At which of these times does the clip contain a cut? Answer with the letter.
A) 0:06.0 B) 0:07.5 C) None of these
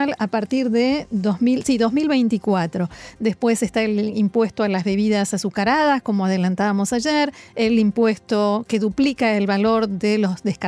C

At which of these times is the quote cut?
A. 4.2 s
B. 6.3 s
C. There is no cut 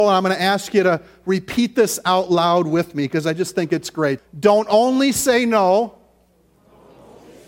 A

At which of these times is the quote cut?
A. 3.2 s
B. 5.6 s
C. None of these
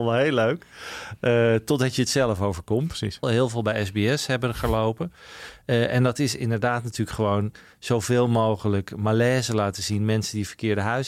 A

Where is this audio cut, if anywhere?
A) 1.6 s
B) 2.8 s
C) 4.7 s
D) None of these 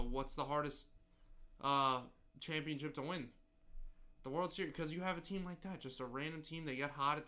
D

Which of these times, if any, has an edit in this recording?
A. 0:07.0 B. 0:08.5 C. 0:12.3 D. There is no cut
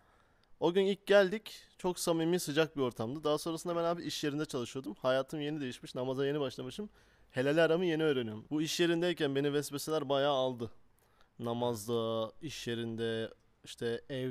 B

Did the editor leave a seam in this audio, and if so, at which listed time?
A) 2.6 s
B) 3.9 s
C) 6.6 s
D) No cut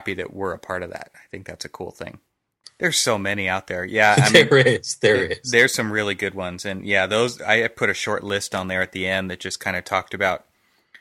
A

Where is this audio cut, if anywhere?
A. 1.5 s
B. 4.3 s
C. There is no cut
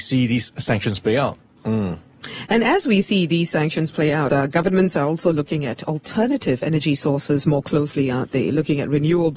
B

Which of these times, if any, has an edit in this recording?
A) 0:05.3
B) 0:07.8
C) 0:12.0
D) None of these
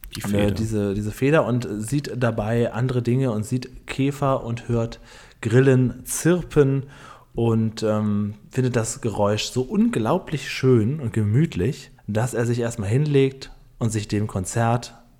C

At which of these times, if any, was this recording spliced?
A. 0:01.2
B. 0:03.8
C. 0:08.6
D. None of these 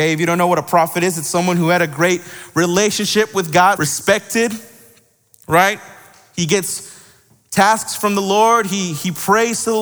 B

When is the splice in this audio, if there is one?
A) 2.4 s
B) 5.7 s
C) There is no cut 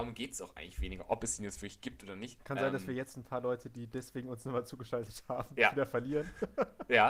A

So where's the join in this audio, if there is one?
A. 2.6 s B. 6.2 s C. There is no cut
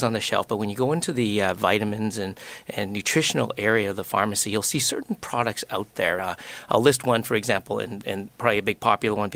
B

